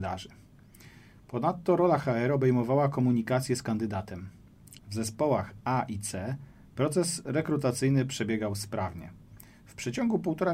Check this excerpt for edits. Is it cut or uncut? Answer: cut